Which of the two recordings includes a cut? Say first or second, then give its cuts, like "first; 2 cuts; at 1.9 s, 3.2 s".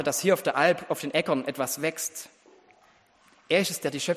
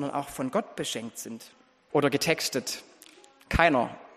second; 1 cut; at 1.9 s